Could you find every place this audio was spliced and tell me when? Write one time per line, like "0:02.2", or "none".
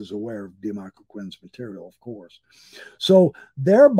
none